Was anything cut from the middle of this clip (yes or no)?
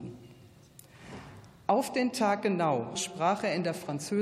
yes